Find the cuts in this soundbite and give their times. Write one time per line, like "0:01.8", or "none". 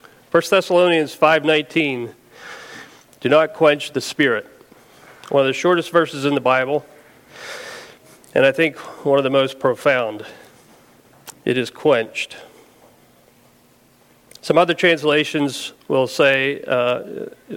0:11.3